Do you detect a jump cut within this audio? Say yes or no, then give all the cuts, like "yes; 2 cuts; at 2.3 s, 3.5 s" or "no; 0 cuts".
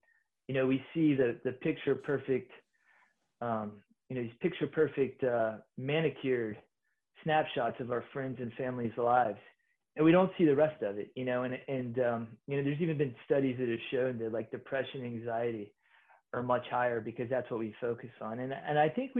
no; 0 cuts